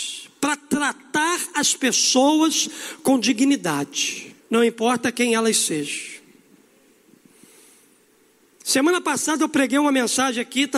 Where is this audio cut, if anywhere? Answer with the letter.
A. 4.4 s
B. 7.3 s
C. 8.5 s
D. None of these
A